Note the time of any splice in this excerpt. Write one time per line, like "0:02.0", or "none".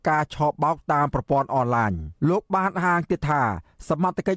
0:02.2